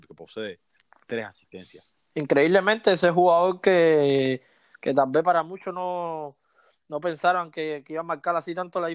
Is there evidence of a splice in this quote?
yes; 1 cut; at 2.1 s

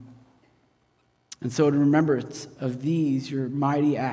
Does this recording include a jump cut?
no; 0 cuts

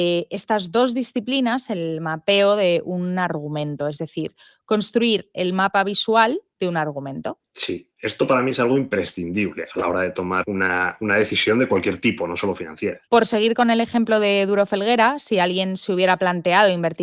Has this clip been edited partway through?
yes; 1 cut; at 13.1 s

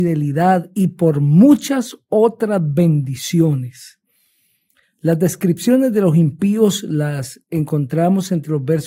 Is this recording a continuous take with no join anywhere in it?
no; 1 cut; at 4.8 s

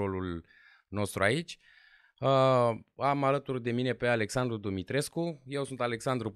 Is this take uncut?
yes; 0 cuts

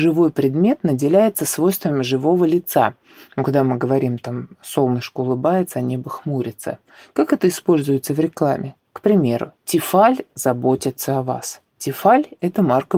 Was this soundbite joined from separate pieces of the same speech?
no; 0 cuts

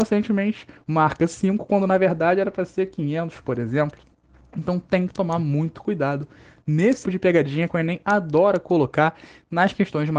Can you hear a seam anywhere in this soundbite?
yes; 1 cut; at 7.0 s

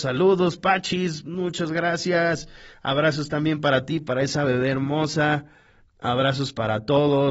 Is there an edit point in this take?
no; 0 cuts

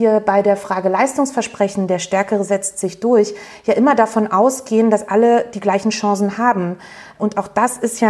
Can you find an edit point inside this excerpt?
no; 0 cuts

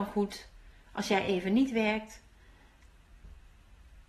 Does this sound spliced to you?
no; 0 cuts

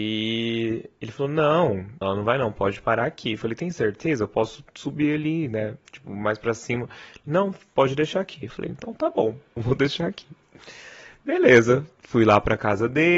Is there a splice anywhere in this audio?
yes; 2 cuts; at 2.0 s, 9.6 s

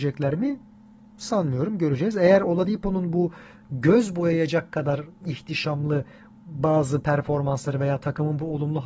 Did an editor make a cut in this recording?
no; 0 cuts

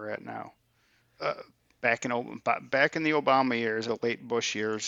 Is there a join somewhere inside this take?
yes; 2 cuts; at 1.2 s, 3.9 s

